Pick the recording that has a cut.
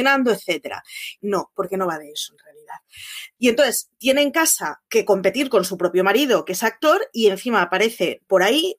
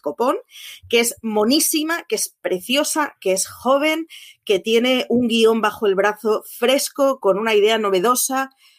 first; 3 cuts; at 1.2 s, 3.4 s, 4.9 s

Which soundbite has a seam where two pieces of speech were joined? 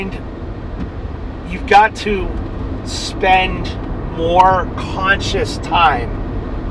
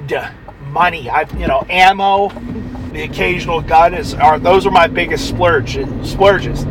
second; 1 cut; at 2.9 s

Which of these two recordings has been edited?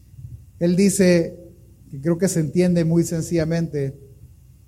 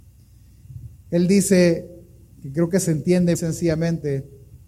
second; 1 cut; at 3.3 s

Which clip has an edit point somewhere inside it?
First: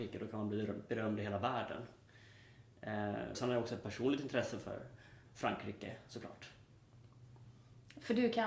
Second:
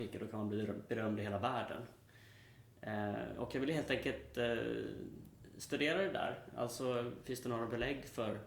first; 1 cut; at 3.3 s

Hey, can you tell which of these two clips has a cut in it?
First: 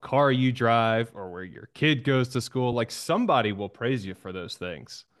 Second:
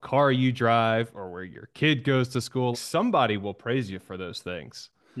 second; 1 cut; at 2.7 s

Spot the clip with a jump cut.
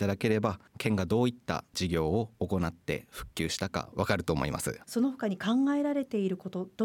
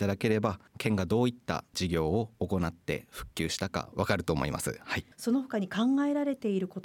first; 1 cut; at 4.8 s

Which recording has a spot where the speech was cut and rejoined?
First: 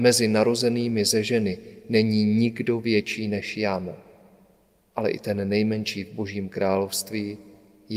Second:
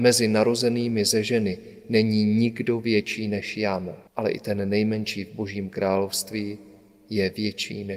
second; 1 cut; at 4.1 s

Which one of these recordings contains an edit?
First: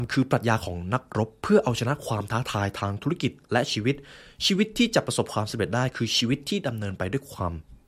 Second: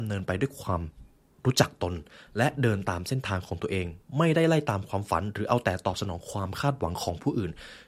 first; 1 cut; at 3.4 s

